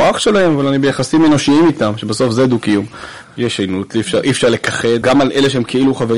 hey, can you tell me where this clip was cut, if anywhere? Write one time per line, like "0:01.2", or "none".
0:03.2
0:05.0